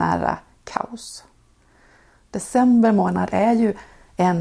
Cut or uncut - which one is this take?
uncut